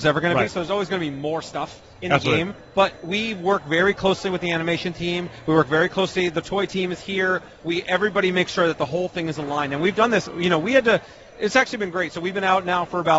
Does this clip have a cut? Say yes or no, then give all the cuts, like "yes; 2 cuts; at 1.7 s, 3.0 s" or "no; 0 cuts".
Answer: no; 0 cuts